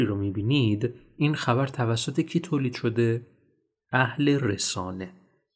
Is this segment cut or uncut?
uncut